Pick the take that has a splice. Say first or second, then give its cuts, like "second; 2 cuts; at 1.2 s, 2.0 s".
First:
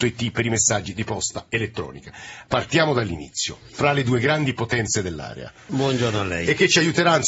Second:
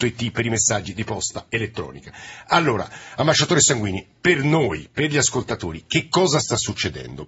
first; 2 cuts; at 2.5 s, 5.7 s